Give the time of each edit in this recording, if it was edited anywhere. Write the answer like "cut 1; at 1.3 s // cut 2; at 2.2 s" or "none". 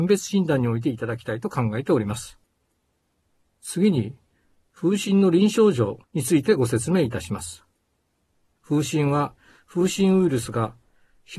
none